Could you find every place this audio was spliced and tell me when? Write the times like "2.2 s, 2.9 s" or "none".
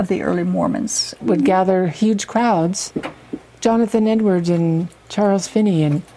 1.2 s

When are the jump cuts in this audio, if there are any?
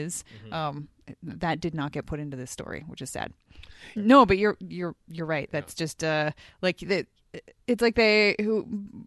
4.0 s

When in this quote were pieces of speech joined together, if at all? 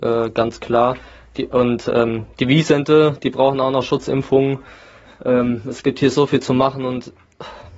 none

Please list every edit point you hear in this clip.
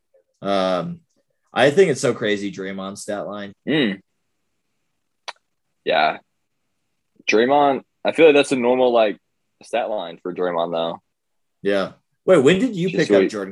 3.5 s

